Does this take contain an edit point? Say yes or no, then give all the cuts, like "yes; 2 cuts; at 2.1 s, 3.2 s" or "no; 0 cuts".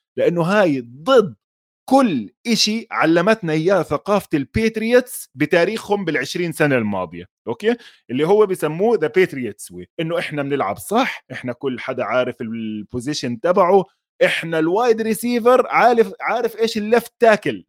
yes; 1 cut; at 9.9 s